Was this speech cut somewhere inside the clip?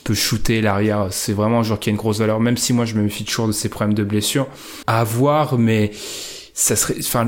yes; 1 cut; at 4.8 s

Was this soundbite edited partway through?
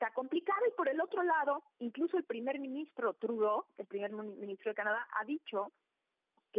no; 0 cuts

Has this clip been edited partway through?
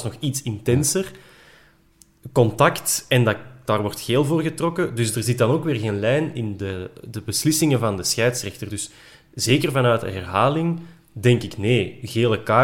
no; 0 cuts

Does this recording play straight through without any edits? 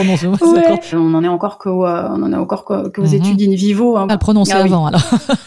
no; 2 cuts; at 0.9 s, 4.1 s

